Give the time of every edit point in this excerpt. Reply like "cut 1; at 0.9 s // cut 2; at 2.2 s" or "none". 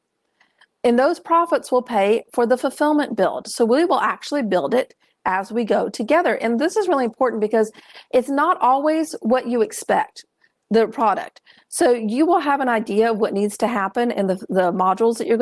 none

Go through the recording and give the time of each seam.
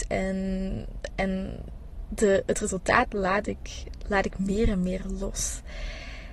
none

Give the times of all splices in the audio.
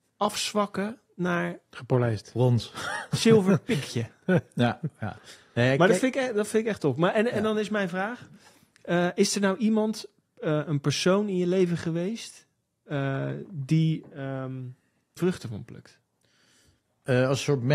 cut 1; at 15.2 s

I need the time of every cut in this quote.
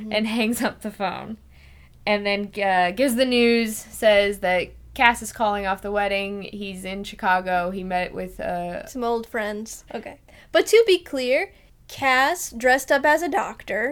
cut 1; at 9.9 s

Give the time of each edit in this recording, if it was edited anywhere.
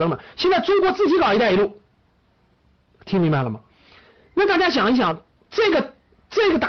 none

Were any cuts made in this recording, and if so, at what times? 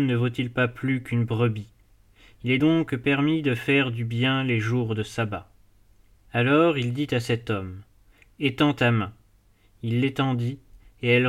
none

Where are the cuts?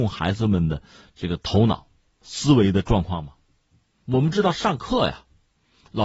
cut 1; at 3.9 s

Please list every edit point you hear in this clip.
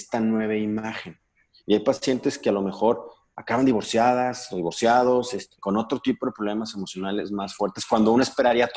cut 1; at 5.6 s

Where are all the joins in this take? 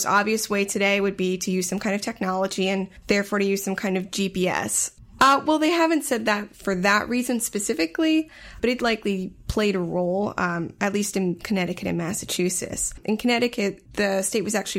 cut 1; at 5.2 s

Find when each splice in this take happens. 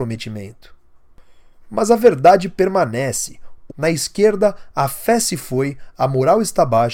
cut 1; at 3.7 s

